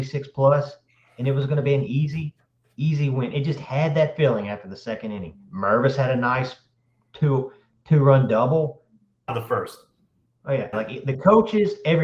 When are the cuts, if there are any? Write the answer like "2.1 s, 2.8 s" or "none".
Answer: 9.3 s, 10.7 s

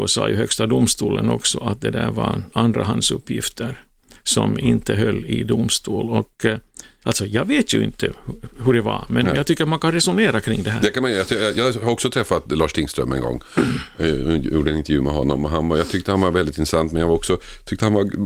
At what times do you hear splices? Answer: none

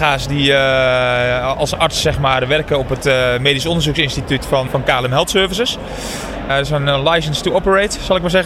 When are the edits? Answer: 4.7 s, 6.5 s

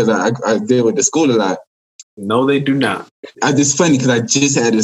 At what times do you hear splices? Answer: 2.0 s, 3.3 s

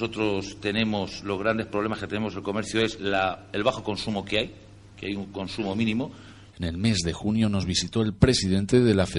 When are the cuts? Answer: 6.5 s

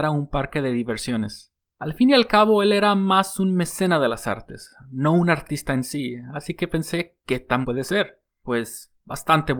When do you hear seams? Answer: 7.6 s

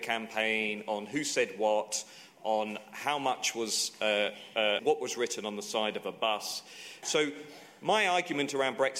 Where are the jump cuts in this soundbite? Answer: 4.8 s, 7.0 s

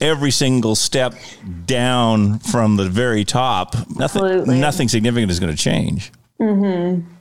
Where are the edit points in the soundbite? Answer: 4.0 s

